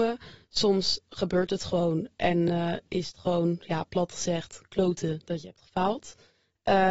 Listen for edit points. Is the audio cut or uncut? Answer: uncut